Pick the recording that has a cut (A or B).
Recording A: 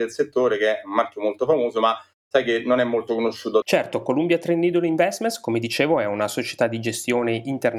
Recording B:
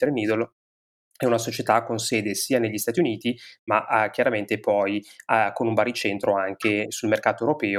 A